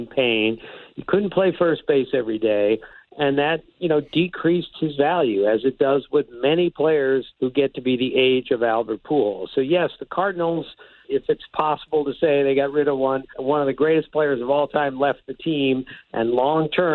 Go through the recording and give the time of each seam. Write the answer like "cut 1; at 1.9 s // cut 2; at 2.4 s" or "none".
cut 1; at 7.3 s // cut 2; at 11.0 s // cut 3; at 13.3 s